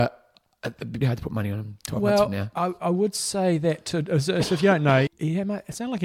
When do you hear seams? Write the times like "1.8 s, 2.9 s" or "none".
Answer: 1.0 s, 5.1 s